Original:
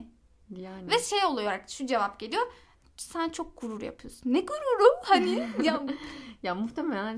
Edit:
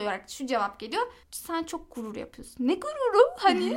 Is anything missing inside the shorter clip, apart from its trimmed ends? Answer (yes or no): yes